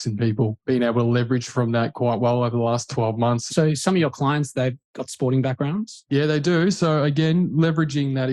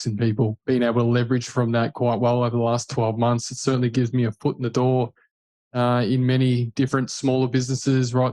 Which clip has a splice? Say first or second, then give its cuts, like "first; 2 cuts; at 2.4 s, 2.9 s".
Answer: first; 1 cut; at 3.5 s